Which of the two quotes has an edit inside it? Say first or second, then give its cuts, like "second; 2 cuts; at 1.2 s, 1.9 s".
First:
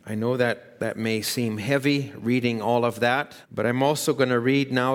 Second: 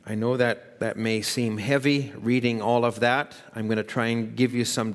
first; 1 cut; at 3.4 s